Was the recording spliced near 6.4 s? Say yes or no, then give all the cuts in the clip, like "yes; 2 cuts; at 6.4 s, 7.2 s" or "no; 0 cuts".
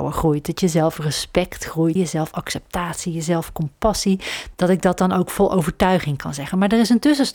no; 2 cuts; at 2.0 s, 4.5 s